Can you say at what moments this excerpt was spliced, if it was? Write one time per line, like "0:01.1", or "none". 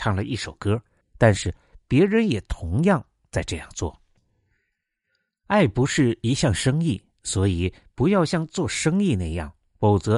0:01.0